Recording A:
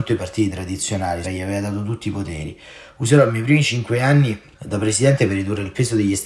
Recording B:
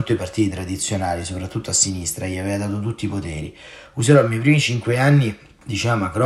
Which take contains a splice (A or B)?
A